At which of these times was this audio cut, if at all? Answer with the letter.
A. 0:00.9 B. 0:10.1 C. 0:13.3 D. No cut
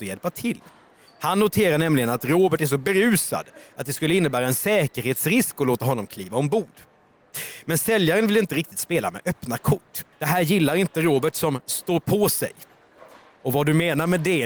B